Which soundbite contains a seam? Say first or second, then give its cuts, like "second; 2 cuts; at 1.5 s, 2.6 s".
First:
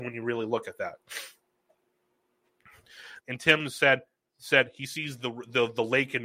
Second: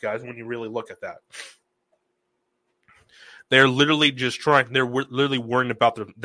first; 1 cut; at 3.2 s